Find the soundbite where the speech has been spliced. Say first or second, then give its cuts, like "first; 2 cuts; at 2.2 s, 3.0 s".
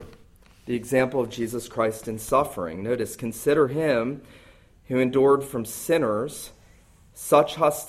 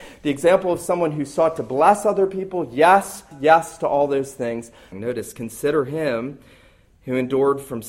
second; 2 cuts; at 3.3 s, 4.9 s